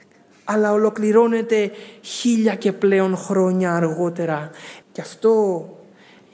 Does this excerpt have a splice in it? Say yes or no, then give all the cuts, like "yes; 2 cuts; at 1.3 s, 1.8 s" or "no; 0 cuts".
yes; 1 cut; at 4.8 s